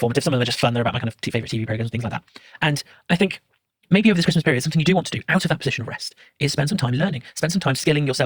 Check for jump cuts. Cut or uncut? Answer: uncut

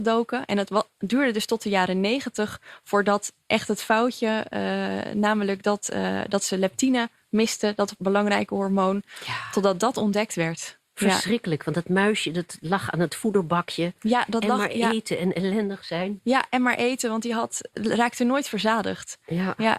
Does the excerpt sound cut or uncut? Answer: cut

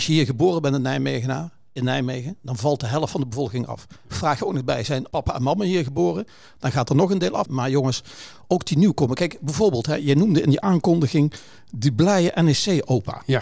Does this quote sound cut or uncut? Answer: cut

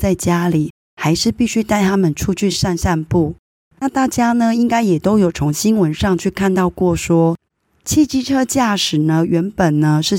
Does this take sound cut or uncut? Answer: uncut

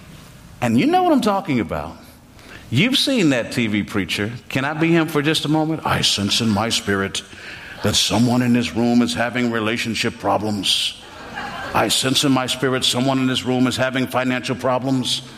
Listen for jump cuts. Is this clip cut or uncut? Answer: uncut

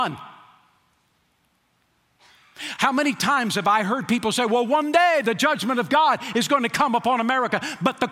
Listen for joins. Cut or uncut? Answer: uncut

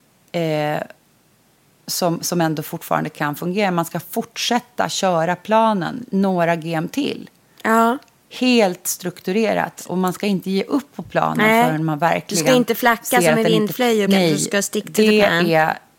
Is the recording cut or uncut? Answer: cut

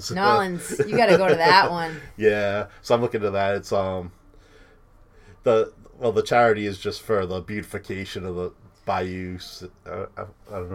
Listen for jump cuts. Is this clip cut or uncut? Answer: uncut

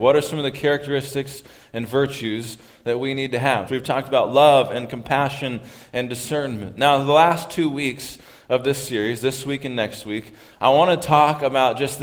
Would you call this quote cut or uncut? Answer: cut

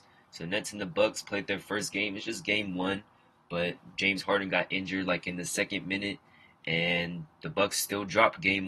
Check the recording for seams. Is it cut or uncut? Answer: uncut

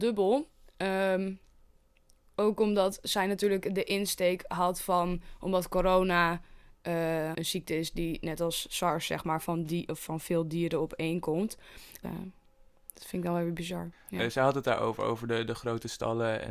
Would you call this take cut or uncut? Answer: cut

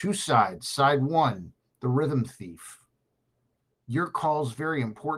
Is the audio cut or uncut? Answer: cut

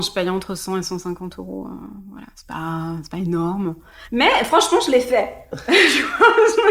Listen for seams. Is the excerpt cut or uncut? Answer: uncut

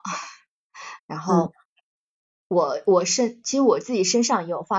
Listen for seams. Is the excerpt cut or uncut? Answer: cut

